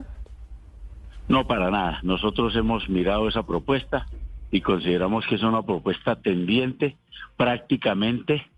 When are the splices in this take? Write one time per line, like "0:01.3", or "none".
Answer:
none